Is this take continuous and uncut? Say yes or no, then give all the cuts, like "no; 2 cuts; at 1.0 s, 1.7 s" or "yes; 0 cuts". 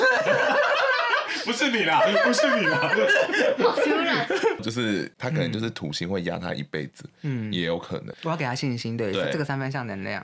no; 2 cuts; at 4.6 s, 8.1 s